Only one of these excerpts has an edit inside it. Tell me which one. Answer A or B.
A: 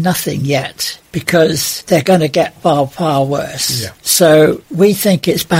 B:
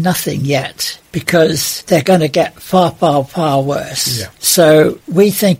A